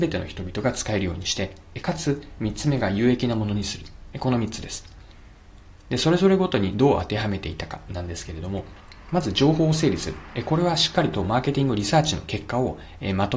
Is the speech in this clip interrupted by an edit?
no; 0 cuts

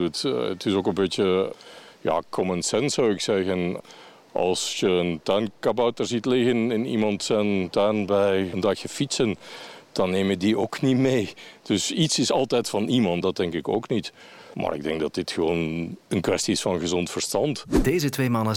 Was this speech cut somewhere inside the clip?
yes; 1 cut; at 13.2 s

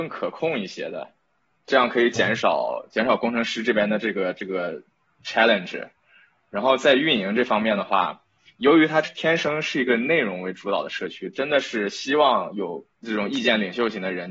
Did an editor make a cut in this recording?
yes; 2 cuts; at 9.0 s, 12.9 s

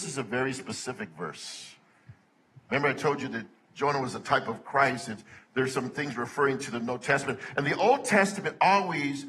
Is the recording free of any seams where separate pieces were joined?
yes; 0 cuts

